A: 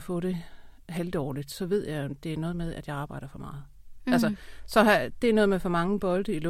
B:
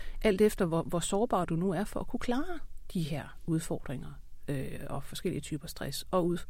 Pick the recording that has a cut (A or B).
A